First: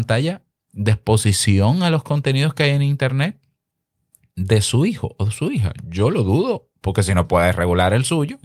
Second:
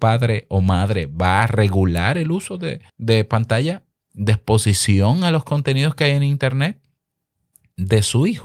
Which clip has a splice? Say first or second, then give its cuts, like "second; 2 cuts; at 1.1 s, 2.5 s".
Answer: second; 1 cut; at 2.9 s